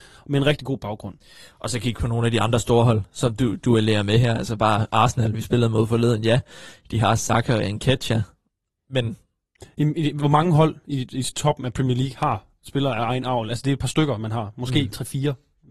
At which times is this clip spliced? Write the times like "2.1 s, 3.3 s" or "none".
none

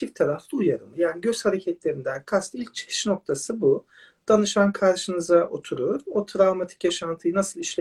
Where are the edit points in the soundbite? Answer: none

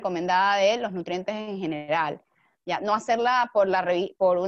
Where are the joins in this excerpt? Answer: none

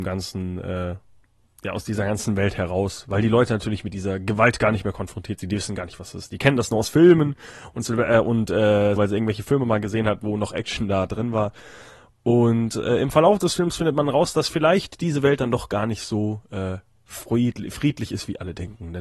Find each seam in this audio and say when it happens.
9.0 s

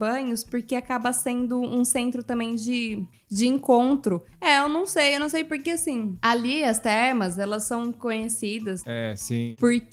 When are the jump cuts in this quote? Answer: 3.1 s, 4.3 s, 8.8 s

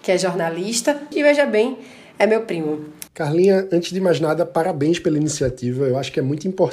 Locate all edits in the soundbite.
1.1 s, 3.1 s

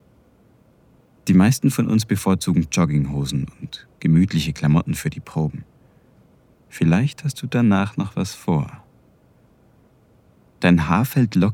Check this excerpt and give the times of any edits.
6.5 s

